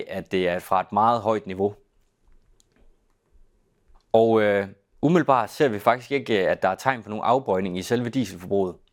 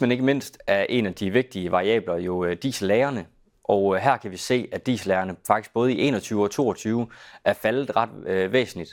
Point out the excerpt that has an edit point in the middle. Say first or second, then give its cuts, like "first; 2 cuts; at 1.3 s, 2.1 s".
first; 1 cut; at 3.9 s